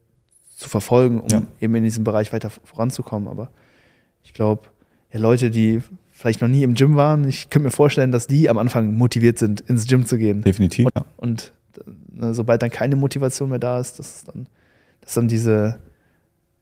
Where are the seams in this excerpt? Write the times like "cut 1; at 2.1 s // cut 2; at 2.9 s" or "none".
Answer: cut 1; at 10.9 s